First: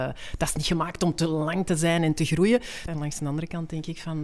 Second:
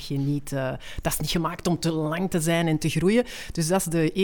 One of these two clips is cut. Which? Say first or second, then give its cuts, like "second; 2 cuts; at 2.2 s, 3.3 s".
first; 1 cut; at 2.9 s